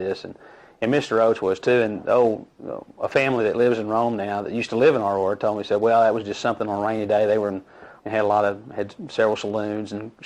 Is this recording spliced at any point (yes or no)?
yes